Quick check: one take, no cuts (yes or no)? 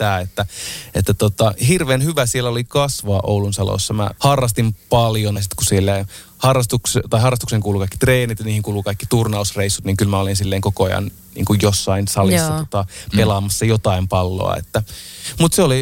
no